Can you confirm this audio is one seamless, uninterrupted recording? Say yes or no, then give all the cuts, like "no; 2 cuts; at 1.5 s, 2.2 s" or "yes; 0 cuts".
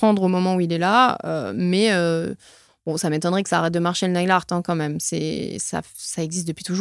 yes; 0 cuts